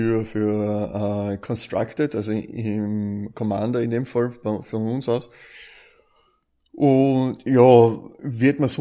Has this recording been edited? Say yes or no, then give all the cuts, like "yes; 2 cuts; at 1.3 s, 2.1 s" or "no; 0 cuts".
no; 0 cuts